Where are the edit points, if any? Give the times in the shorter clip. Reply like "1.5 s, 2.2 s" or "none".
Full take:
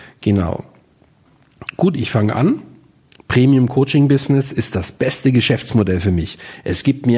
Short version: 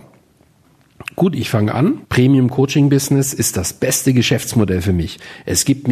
2.0 s